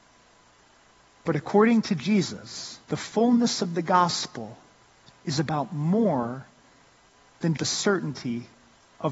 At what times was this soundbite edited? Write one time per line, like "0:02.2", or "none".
0:01.2
0:02.8
0:07.6